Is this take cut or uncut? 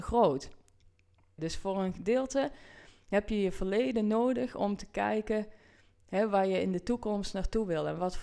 cut